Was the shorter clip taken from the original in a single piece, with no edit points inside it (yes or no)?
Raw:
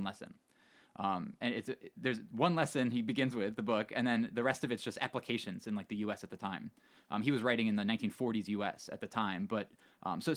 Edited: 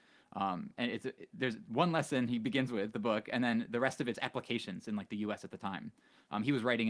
no